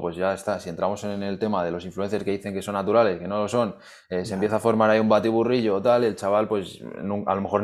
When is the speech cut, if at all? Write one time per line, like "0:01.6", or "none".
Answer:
none